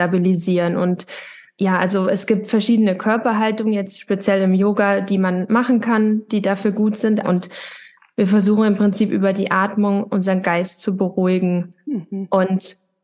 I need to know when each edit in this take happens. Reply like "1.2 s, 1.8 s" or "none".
7.2 s

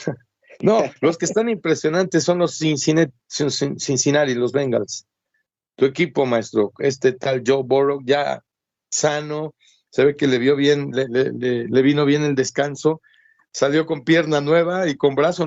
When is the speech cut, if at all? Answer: none

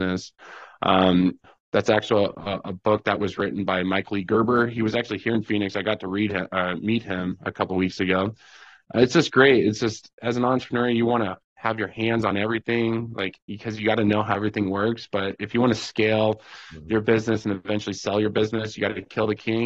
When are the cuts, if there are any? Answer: none

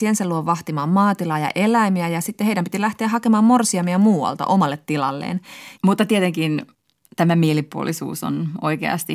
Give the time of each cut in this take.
5.8 s

